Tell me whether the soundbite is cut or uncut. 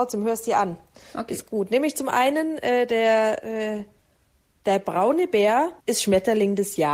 cut